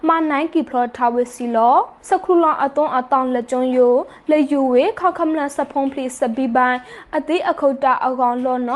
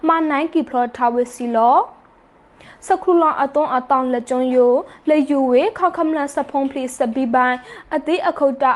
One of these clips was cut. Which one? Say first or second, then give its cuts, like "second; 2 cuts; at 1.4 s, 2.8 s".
first; 1 cut; at 2.0 s